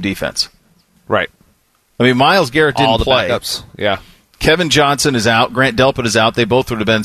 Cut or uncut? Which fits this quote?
uncut